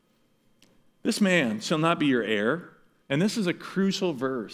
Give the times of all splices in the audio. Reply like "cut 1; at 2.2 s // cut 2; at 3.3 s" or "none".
cut 1; at 3.0 s